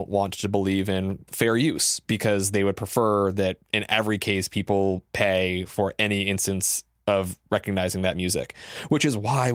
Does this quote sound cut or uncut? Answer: cut